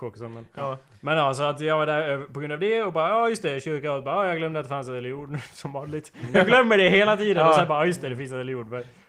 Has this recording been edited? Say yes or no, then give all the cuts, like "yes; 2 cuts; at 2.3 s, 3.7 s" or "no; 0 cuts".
no; 0 cuts